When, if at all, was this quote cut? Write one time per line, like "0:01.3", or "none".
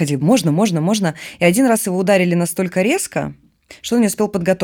none